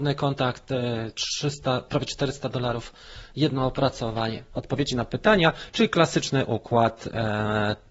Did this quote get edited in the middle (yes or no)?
no